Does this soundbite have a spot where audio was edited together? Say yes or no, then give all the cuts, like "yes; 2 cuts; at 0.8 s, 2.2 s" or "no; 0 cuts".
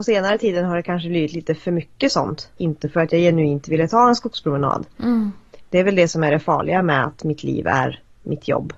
yes; 1 cut; at 2.6 s